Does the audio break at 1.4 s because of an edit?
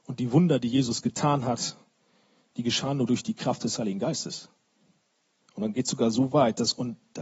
no; 1 cut; at 5.4 s

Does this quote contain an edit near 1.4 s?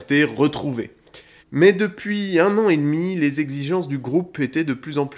yes; 1 cut; at 1.4 s

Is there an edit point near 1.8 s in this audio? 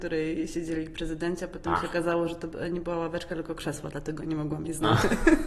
no; 0 cuts

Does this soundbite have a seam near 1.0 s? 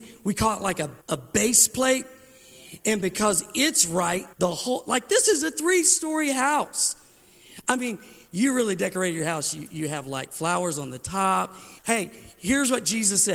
yes; 3 cuts; at 1.0 s, 4.3 s, 11.8 s

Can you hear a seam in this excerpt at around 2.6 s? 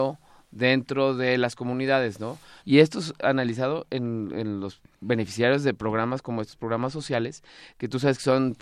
yes; 1 cut; at 2.6 s

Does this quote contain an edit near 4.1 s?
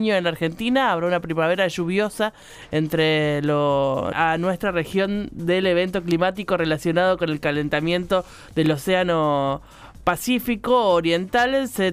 yes; 1 cut; at 4.1 s

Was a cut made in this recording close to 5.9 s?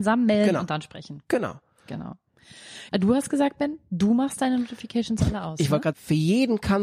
yes; 2 cuts; at 2.9 s, 5.9 s

